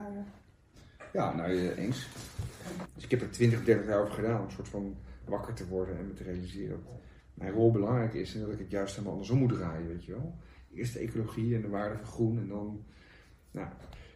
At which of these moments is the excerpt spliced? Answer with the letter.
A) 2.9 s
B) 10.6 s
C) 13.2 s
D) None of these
A